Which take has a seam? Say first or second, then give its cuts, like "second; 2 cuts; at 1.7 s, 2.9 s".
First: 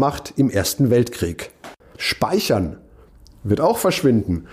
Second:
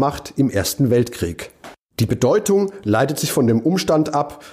first; 1 cut; at 1.8 s